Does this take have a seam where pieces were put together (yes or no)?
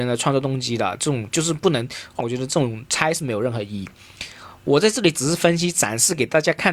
yes